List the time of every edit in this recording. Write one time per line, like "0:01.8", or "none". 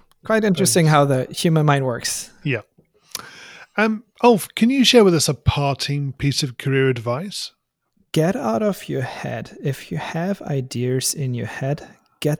none